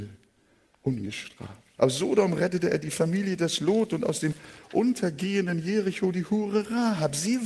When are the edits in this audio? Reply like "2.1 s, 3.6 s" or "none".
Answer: 1.8 s